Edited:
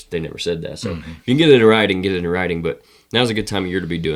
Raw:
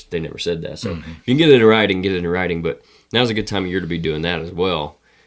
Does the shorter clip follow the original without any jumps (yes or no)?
yes